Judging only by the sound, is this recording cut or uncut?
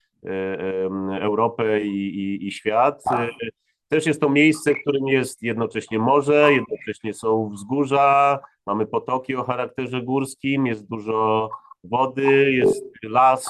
uncut